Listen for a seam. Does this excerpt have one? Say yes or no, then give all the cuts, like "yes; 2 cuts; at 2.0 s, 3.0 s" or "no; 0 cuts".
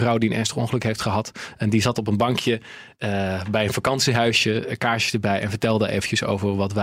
no; 0 cuts